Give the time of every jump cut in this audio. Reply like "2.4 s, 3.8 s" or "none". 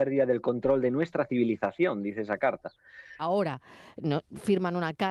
3.2 s